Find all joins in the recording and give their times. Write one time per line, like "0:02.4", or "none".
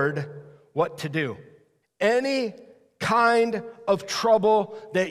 0:01.8